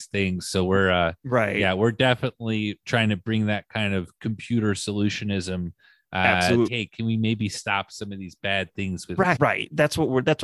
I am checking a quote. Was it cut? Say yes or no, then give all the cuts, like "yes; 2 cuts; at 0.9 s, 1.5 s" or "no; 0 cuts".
yes; 2 cuts; at 6.7 s, 9.4 s